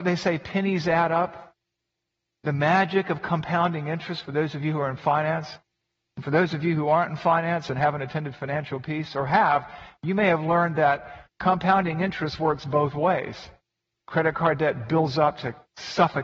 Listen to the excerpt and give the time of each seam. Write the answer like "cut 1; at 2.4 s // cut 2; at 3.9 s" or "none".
none